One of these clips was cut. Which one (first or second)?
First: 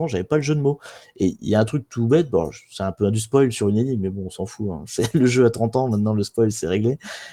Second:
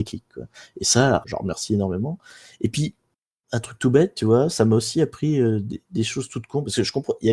second